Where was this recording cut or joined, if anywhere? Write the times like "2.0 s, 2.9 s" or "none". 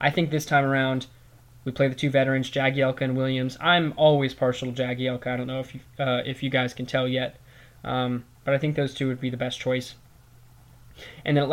none